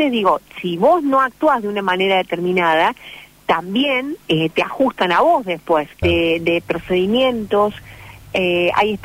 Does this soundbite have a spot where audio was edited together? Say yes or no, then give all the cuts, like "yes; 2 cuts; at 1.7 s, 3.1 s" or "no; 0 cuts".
yes; 1 cut; at 6.0 s